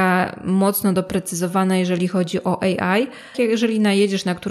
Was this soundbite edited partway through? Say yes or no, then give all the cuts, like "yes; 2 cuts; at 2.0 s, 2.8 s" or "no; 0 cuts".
yes; 1 cut; at 3.3 s